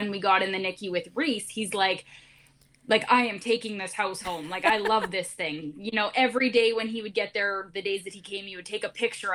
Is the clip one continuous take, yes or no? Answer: yes